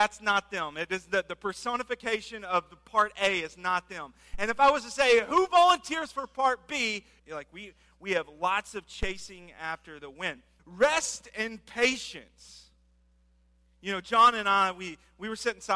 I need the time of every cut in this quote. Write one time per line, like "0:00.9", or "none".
0:07.2
0:10.6